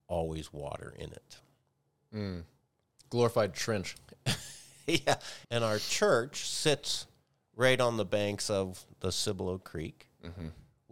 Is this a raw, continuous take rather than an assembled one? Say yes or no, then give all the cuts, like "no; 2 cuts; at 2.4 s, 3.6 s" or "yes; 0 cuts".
no; 1 cut; at 5.4 s